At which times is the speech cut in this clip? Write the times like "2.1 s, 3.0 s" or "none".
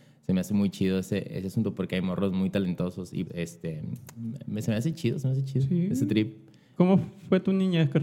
3.3 s